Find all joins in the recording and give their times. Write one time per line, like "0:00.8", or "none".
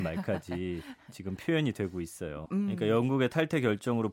0:02.5